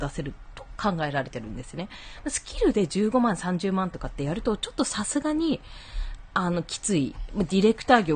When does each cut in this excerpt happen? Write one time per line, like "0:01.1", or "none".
none